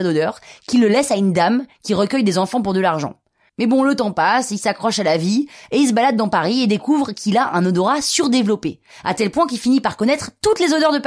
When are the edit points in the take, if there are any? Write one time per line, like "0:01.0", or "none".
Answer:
0:03.5

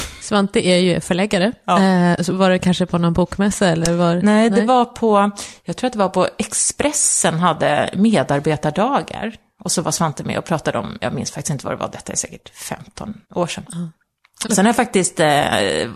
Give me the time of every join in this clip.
0:13.2
0:14.4

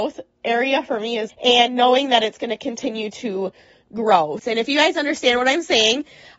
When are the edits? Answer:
0:01.3
0:04.4

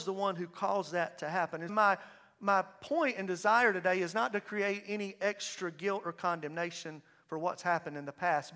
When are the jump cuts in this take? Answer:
0:01.7

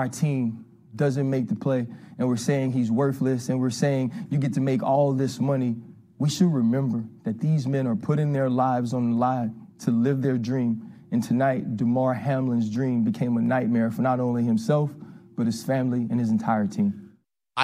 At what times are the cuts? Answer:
none

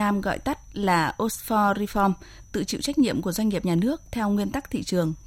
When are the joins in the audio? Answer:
0:02.4

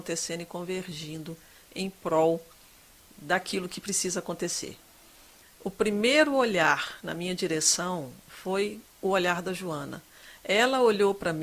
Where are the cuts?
0:05.4
0:08.9

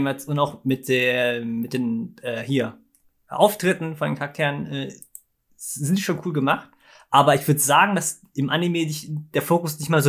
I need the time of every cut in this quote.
none

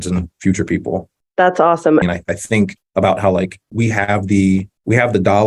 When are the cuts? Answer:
0:02.0
0:03.7

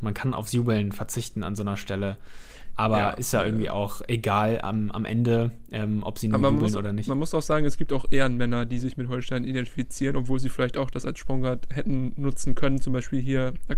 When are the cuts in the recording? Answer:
none

